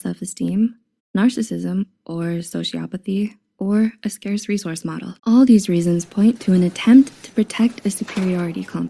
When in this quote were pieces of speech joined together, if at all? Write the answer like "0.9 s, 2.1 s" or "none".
5.2 s